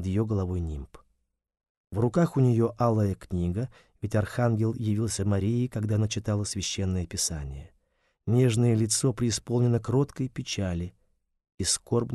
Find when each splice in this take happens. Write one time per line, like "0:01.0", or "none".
none